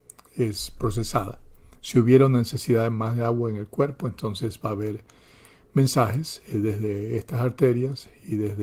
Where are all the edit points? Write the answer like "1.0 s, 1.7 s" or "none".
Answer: none